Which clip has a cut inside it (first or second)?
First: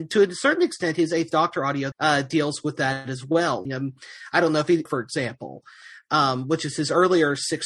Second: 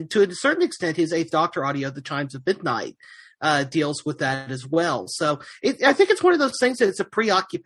first